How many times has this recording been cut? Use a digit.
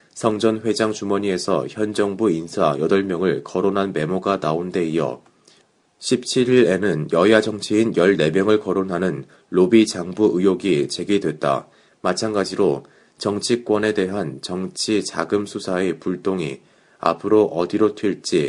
1